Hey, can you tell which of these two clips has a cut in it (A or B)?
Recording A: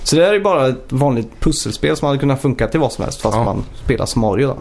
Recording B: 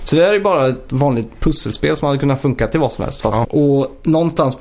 B